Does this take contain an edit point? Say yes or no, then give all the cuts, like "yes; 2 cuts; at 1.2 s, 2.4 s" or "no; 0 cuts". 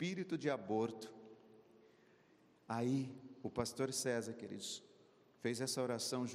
no; 0 cuts